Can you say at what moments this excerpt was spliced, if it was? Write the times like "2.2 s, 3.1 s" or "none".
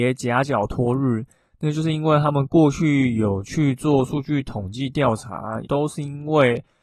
5.7 s